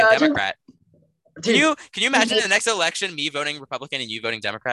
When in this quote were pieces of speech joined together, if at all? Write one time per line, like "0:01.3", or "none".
none